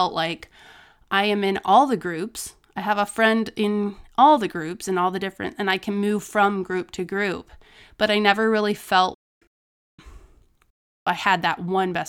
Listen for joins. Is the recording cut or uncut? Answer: uncut